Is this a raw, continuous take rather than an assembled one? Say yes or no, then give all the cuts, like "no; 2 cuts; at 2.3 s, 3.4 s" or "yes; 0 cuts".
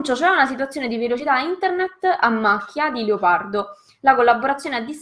yes; 0 cuts